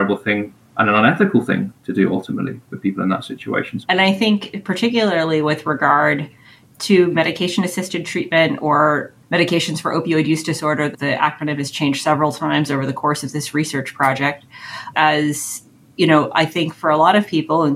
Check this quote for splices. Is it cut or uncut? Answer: cut